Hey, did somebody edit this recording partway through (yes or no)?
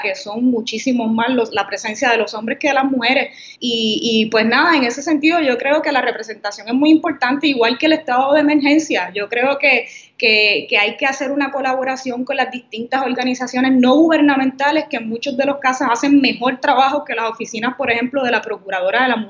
yes